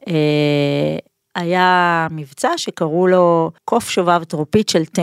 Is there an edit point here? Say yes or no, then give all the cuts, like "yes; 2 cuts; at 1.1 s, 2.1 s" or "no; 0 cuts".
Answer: yes; 1 cut; at 3.6 s